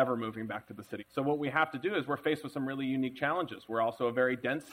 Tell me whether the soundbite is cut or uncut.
cut